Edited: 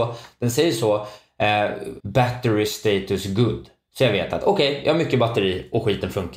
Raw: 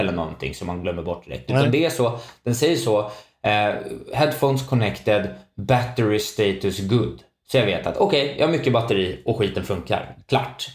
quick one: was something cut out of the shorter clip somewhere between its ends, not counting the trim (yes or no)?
yes